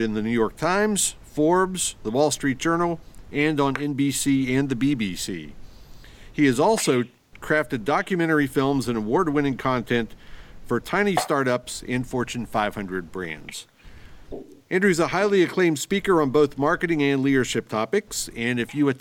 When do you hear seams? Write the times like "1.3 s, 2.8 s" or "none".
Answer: none